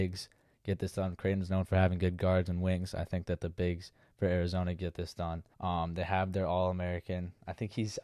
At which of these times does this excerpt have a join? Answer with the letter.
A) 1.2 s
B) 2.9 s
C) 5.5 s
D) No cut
C